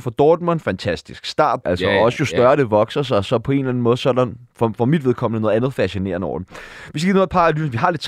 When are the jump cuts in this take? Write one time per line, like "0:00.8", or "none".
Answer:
0:01.6